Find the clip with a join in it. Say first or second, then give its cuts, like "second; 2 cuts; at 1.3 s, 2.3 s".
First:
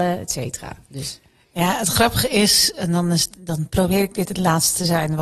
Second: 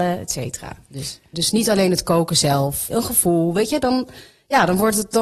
second; 2 cuts; at 1.3 s, 2.9 s